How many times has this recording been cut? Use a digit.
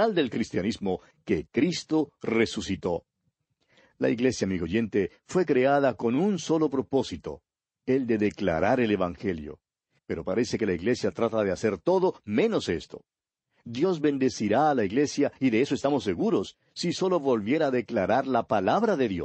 1